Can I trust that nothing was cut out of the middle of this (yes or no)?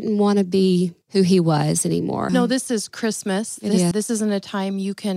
no